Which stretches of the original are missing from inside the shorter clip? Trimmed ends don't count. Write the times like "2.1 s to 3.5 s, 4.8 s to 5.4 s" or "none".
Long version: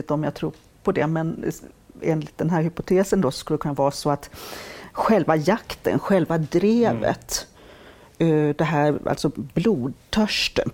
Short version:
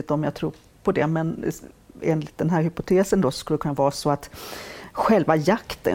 none